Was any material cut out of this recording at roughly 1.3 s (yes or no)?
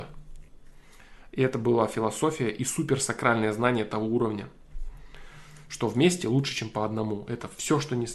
no